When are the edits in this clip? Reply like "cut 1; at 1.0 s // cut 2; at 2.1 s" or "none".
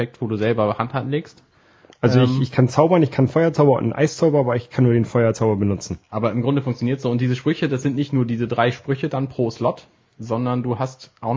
cut 1; at 6.0 s